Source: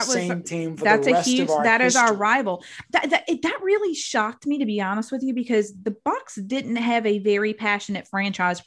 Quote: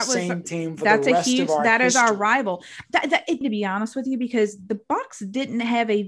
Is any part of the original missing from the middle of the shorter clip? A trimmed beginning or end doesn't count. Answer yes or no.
yes